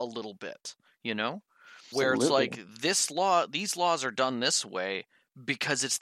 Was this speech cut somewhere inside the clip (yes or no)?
yes